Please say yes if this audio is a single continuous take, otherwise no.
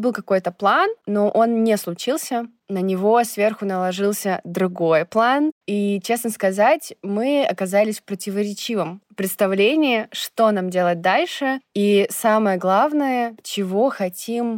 yes